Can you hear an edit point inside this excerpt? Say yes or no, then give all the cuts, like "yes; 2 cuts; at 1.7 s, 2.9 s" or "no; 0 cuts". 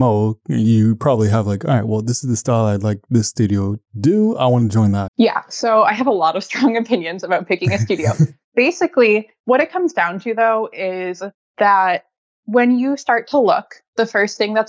yes; 1 cut; at 5.1 s